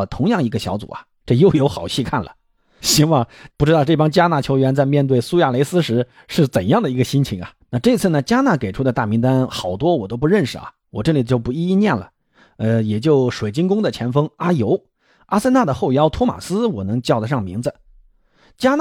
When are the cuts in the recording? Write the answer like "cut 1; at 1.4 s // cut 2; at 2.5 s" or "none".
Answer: cut 1; at 2.8 s // cut 2; at 7.6 s